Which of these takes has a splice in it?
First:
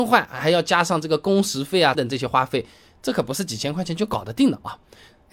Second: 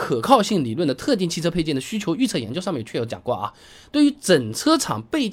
first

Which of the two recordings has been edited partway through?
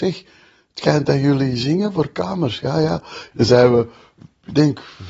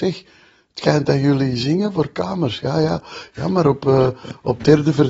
first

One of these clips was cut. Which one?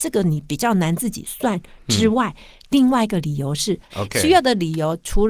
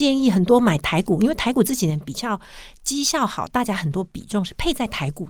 first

